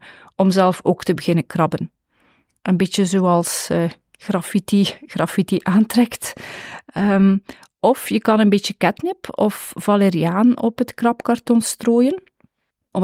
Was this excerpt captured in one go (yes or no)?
yes